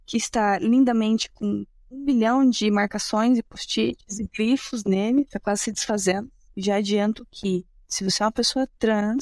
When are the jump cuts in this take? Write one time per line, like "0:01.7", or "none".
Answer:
0:06.5